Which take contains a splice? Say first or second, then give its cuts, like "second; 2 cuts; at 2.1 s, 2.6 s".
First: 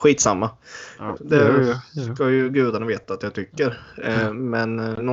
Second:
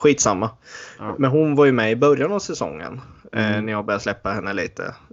first; 1 cut; at 1.2 s